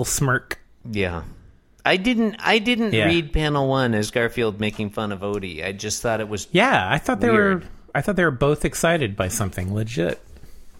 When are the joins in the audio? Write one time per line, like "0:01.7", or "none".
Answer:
none

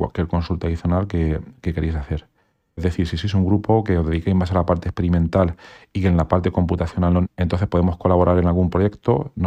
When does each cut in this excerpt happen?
0:02.8
0:07.2

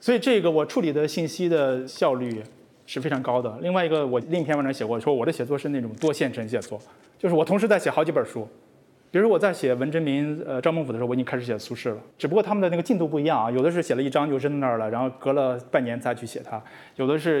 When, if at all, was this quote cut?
0:12.1

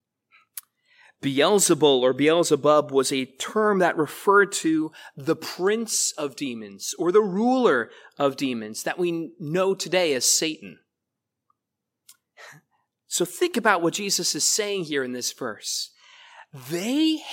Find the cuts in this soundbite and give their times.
none

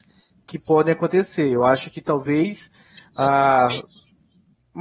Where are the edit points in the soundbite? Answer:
none

